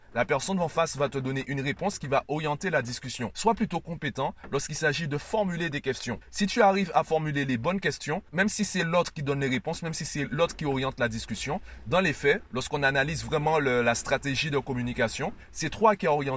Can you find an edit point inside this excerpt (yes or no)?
yes